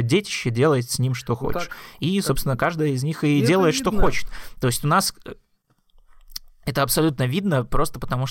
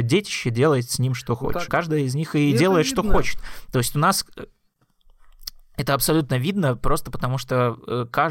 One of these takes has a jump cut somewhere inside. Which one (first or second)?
second